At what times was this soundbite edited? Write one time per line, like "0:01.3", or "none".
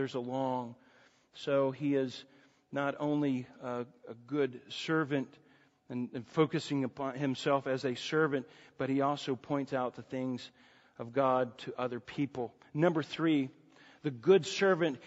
none